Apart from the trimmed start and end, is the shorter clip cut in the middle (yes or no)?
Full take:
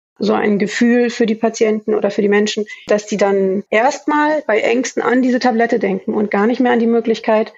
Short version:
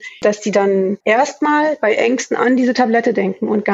no